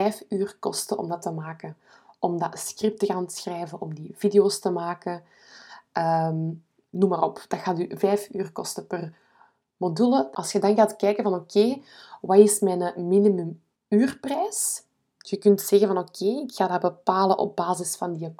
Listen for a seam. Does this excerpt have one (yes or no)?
yes